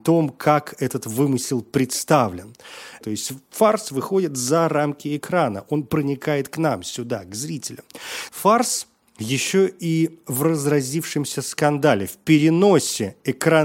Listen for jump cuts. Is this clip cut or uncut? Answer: cut